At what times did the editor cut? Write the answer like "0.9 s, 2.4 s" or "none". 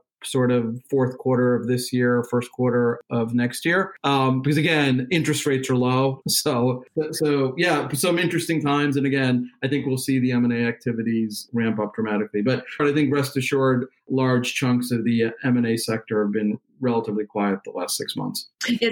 6.2 s, 12.8 s